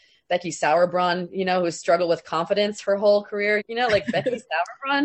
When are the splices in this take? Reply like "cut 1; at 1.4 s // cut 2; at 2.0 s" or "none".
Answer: cut 1; at 3.6 s